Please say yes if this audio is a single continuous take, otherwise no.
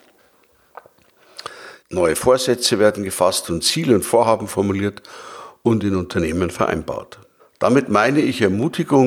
no